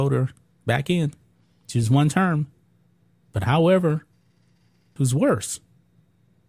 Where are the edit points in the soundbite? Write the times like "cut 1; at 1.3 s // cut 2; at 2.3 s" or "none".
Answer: cut 1; at 5.0 s